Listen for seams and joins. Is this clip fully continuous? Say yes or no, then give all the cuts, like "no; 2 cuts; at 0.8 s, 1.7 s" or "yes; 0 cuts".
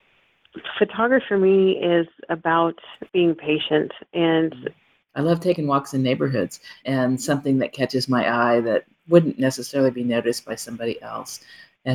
no; 3 cuts; at 3.1 s, 5.1 s, 6.8 s